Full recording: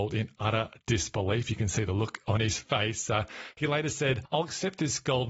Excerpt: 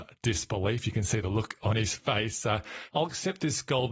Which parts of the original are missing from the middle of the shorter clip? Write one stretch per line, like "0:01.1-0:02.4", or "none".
0:03.5-0:04.3

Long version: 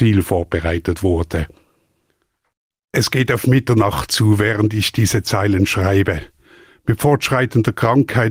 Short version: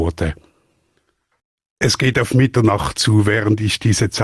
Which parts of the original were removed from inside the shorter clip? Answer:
none

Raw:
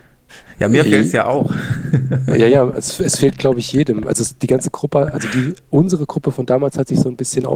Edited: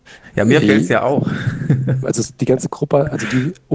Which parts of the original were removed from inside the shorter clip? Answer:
0:02.3-0:04.0

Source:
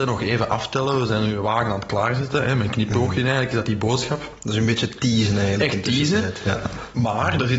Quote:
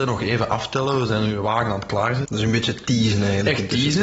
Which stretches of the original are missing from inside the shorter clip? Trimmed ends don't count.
0:02.2-0:04.4

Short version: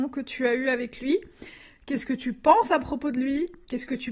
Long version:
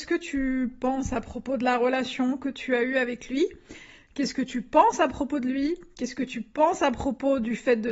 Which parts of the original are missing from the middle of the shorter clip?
none

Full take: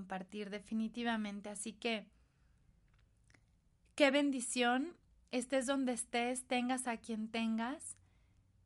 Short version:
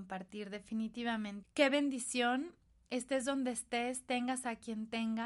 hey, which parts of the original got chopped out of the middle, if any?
0:01.4-0:03.8

